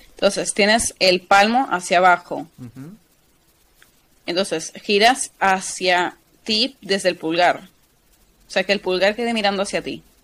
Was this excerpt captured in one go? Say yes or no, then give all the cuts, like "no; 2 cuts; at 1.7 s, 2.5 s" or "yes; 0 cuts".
yes; 0 cuts